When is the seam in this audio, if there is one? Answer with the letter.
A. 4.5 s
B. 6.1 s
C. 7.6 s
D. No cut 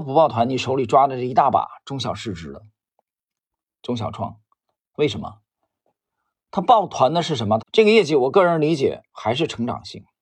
C